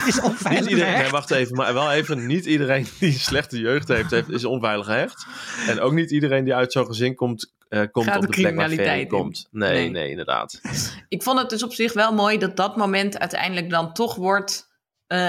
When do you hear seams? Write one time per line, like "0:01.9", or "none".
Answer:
none